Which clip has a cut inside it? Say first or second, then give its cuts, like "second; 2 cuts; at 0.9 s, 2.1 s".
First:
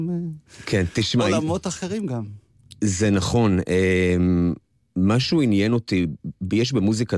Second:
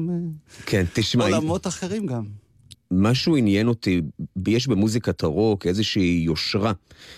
second; 1 cut; at 2.7 s